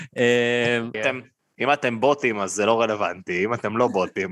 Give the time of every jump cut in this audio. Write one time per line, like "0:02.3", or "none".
0:00.9